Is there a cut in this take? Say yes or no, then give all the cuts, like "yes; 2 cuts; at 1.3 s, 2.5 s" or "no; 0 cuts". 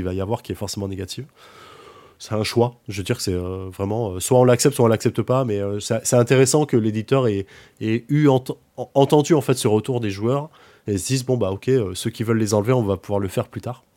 no; 0 cuts